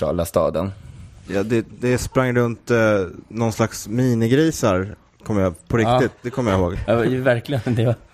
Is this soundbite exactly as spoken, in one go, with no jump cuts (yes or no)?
yes